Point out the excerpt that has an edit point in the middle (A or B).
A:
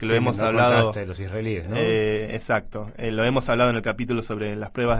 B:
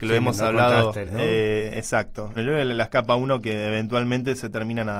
B